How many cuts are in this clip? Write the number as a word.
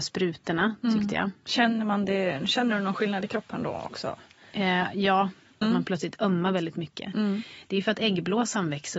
one